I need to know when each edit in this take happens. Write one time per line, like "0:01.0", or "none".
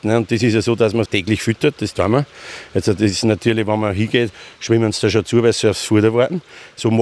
0:01.1